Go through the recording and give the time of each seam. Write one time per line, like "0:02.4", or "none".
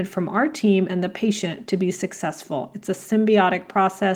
none